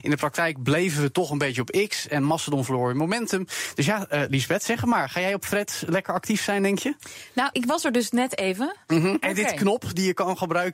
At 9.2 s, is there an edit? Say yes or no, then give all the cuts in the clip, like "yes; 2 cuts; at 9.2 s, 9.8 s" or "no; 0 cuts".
yes; 2 cuts; at 7.5 s, 9.2 s